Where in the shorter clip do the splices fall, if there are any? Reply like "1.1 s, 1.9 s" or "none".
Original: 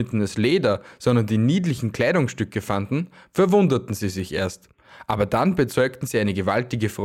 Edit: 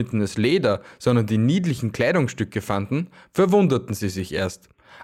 none